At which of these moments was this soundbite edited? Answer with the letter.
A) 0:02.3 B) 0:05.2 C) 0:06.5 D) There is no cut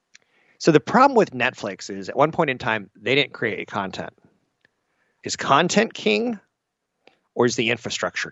B